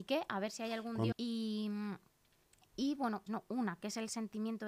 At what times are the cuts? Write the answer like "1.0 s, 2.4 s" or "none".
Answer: 1.1 s, 3.3 s